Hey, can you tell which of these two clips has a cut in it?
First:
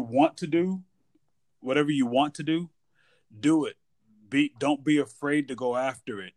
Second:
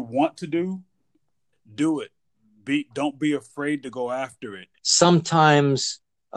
second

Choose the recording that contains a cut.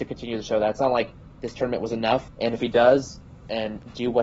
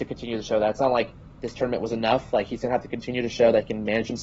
first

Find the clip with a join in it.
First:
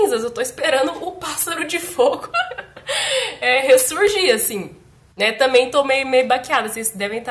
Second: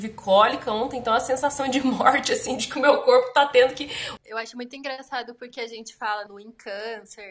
second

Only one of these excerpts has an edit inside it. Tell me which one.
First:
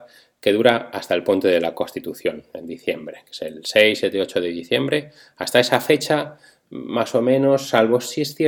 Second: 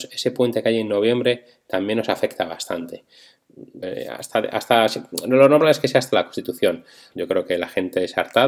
second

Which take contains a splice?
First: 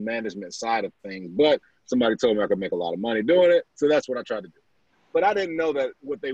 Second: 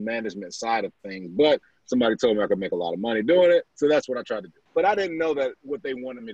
second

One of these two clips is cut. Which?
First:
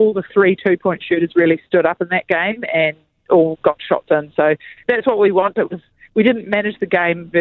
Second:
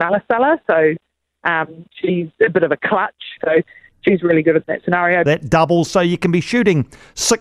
second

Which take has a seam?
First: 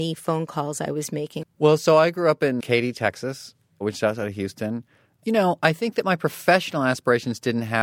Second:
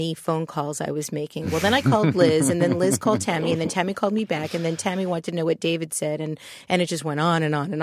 first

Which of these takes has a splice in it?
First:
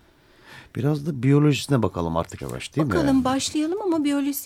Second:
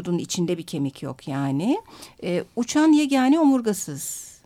first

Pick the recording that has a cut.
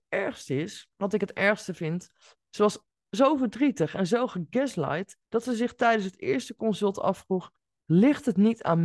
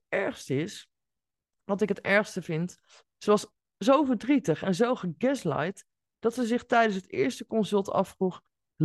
first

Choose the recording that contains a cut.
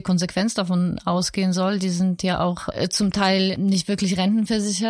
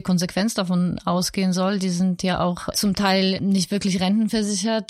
second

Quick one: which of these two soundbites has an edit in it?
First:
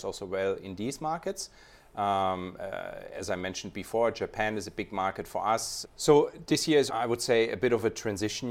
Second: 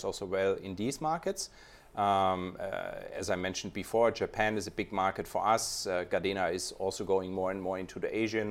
first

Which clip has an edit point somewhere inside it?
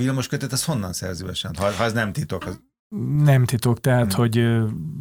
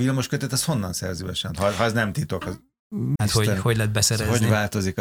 second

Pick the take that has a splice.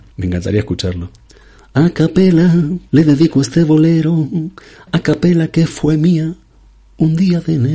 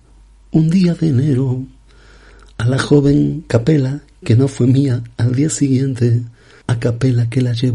first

